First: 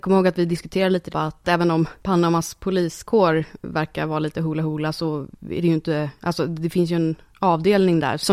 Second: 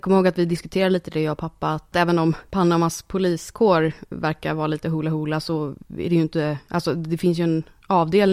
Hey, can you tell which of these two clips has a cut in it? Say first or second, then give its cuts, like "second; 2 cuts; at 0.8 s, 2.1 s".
first; 1 cut; at 1.1 s